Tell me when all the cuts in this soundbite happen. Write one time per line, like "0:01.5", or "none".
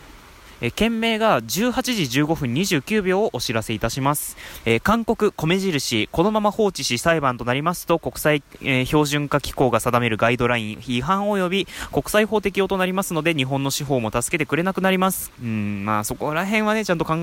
0:04.6
0:15.3